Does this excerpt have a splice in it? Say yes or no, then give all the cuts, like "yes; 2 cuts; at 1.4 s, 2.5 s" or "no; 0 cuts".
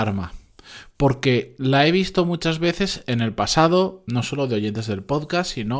no; 0 cuts